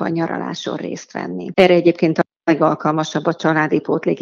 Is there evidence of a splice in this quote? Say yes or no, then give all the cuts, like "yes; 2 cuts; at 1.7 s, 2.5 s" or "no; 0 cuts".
yes; 1 cut; at 1.5 s